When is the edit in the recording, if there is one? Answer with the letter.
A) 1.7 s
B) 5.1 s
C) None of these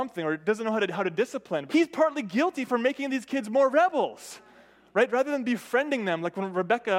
A